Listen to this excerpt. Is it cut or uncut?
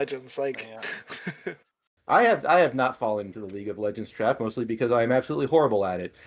uncut